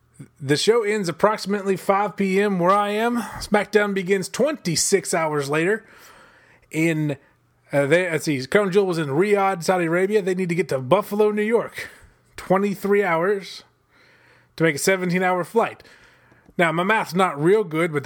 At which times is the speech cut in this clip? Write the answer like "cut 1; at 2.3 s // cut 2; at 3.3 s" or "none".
none